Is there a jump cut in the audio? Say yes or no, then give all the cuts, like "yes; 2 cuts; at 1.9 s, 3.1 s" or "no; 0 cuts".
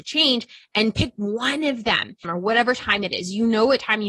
yes; 1 cut; at 2.2 s